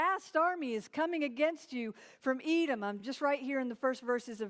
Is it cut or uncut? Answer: uncut